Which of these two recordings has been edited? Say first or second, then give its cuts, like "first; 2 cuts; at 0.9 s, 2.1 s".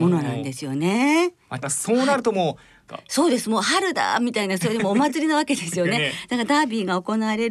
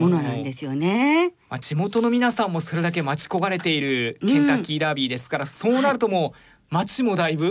first; 2 cuts; at 1.6 s, 2.9 s